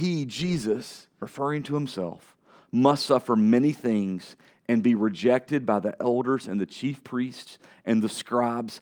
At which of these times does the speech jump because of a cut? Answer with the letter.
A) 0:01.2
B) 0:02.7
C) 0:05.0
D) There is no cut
A